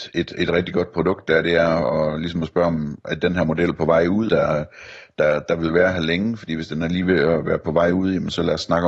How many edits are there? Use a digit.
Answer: 1